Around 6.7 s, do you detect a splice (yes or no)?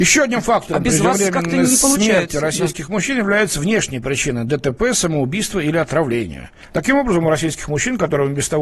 yes